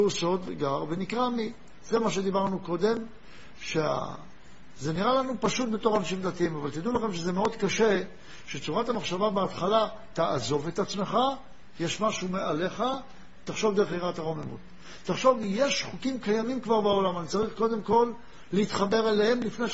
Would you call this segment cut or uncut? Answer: uncut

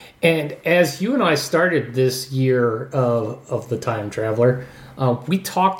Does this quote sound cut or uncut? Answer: uncut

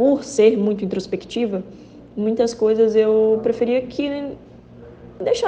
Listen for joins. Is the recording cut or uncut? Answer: uncut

